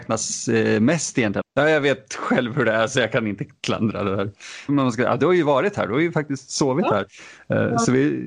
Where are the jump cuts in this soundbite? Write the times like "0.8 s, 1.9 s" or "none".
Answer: 1.4 s, 4.7 s